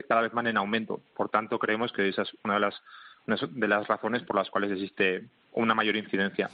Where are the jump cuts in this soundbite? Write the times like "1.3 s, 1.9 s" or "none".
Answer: none